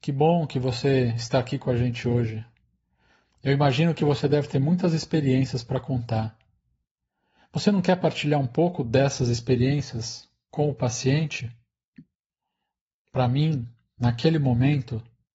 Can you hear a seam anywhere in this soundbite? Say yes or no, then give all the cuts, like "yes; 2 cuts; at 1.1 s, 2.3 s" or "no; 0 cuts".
no; 0 cuts